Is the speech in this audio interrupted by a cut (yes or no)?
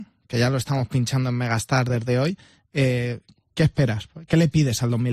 no